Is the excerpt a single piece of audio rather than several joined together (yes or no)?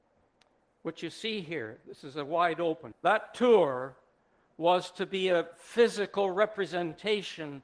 no